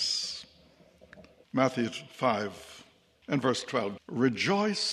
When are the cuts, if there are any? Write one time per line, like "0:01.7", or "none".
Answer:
0:01.4
0:04.0

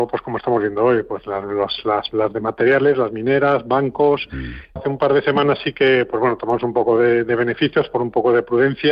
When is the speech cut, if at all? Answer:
0:04.8

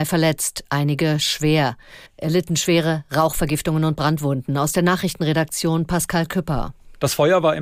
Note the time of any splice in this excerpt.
0:02.1

